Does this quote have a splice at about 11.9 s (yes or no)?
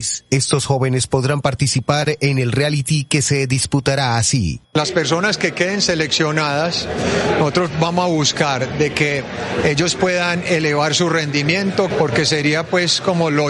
yes